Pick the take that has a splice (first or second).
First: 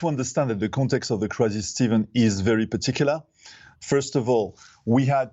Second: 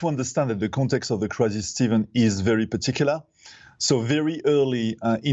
first